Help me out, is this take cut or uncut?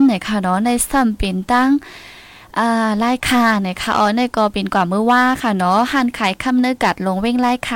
uncut